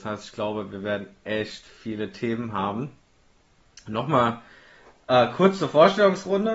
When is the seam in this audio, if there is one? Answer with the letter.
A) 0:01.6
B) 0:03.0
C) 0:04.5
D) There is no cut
D